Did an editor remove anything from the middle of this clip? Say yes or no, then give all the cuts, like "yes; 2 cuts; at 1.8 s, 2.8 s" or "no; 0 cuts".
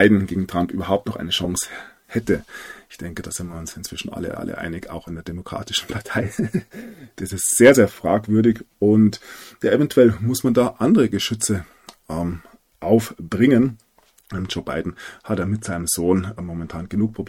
no; 0 cuts